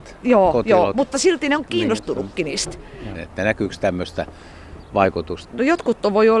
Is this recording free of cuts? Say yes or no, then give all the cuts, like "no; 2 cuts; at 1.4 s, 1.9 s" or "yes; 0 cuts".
no; 2 cuts; at 3.1 s, 5.4 s